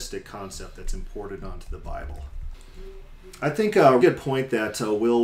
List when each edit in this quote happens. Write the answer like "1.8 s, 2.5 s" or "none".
4.0 s